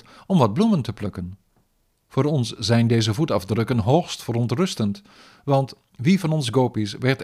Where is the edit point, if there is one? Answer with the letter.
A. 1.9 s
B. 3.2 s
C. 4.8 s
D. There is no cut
A